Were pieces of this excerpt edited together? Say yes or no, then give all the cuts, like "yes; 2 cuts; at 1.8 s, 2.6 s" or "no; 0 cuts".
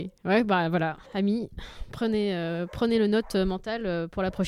yes; 1 cut; at 1.0 s